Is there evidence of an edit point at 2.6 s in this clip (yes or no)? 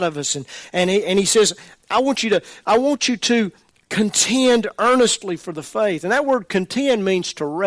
no